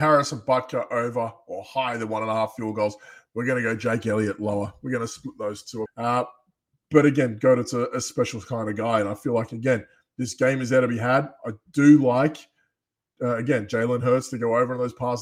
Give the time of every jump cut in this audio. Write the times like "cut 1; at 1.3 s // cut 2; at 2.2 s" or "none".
cut 1; at 5.9 s